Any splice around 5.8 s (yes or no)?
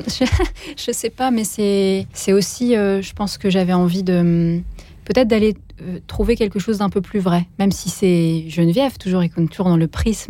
no